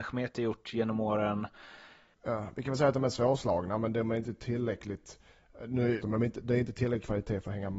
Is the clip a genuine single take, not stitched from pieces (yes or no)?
no